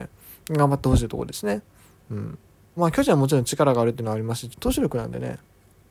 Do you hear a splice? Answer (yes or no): yes